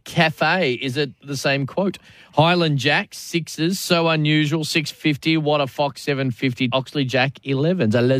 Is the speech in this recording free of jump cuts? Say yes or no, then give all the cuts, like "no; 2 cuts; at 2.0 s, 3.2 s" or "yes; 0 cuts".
no; 1 cut; at 6.7 s